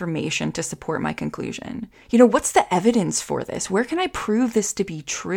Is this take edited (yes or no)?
yes